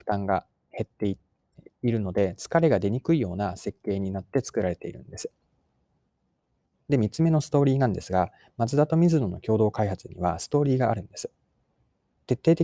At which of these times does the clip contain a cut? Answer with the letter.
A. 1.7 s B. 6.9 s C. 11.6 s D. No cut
B